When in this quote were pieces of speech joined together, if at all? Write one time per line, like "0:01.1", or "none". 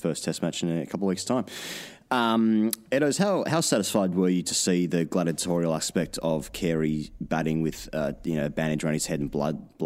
none

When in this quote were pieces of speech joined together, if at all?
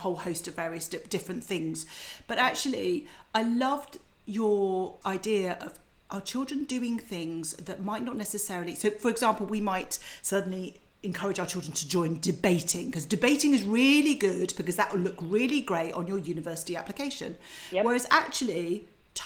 none

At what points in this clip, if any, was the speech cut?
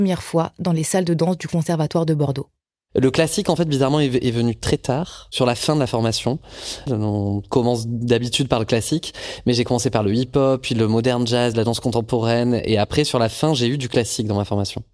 0:06.9
0:11.5

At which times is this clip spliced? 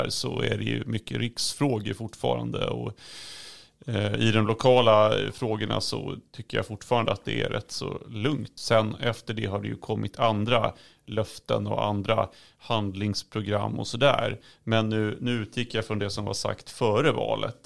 0:08.6

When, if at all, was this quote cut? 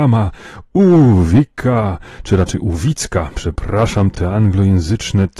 none

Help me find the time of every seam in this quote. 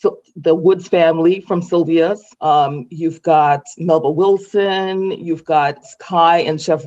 0:02.3
0:05.8

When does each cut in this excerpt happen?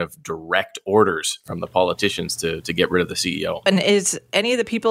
0:03.7

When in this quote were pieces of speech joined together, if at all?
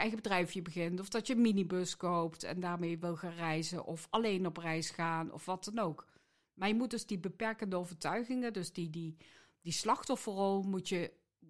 none

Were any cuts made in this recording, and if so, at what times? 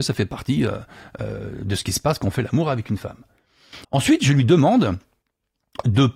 0:03.8

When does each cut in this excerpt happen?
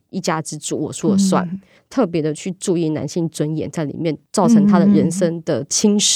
0:01.8

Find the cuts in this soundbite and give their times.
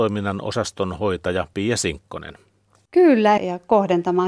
0:03.4

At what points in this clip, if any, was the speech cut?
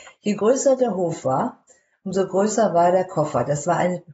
none

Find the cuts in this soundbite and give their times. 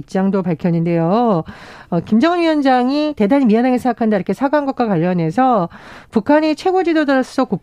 none

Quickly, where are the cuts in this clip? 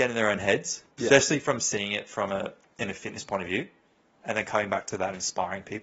0:00.9

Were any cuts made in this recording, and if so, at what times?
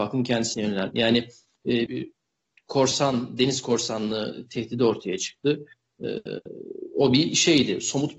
0:01.9

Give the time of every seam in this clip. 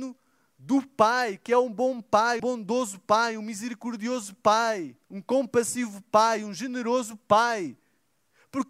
0:02.4
0:05.0

